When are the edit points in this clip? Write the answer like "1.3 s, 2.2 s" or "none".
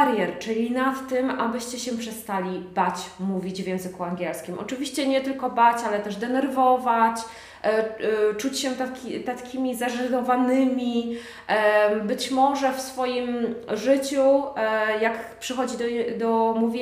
none

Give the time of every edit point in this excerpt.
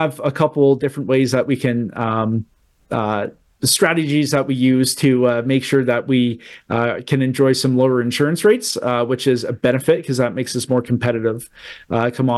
none

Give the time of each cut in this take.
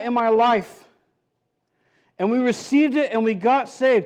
none

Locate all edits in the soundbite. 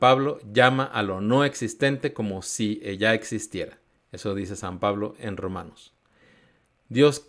none

